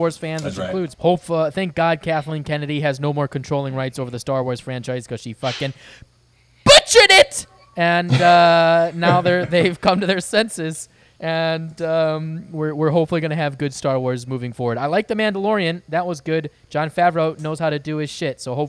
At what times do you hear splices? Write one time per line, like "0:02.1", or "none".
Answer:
0:00.9